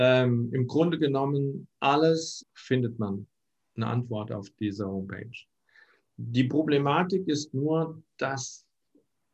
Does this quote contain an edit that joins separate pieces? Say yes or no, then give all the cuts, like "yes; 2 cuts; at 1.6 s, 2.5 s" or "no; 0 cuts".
yes; 1 cut; at 2.4 s